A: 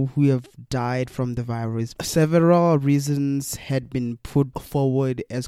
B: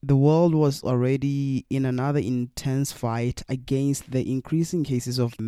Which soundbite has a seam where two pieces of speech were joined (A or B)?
A